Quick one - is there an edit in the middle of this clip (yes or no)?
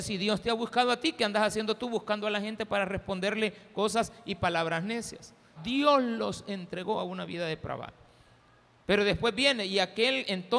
yes